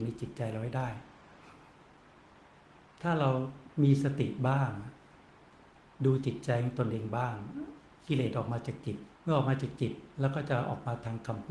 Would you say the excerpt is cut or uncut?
cut